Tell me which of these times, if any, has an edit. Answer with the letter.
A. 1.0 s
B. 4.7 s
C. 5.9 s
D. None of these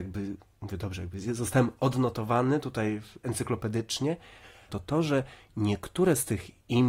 B